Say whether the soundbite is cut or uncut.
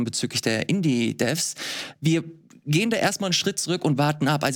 cut